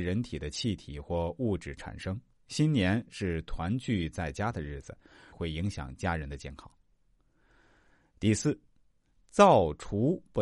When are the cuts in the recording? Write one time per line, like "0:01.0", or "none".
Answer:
0:05.3